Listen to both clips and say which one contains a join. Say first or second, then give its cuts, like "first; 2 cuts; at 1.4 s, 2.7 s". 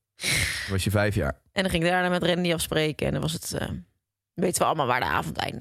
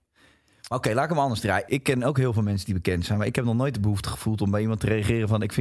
second; 1 cut; at 1.7 s